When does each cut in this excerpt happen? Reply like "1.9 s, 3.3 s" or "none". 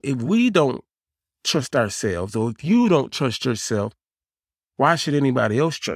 none